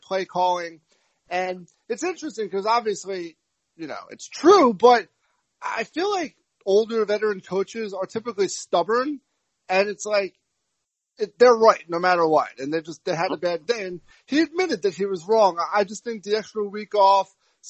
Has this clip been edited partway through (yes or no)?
no